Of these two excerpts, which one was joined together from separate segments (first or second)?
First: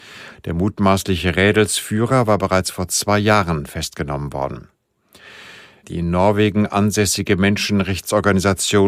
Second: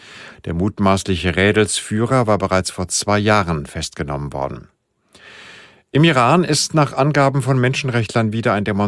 first